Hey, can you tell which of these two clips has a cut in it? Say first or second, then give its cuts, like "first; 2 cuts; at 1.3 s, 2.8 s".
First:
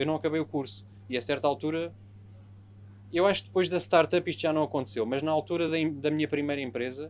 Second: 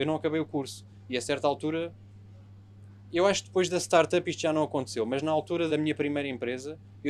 second; 1 cut; at 5.7 s